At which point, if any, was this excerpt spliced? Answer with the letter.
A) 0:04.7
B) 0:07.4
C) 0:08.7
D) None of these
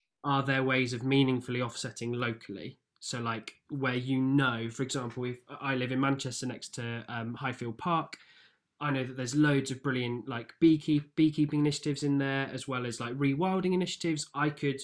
D